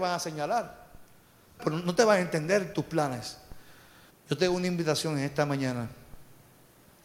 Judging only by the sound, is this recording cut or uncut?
cut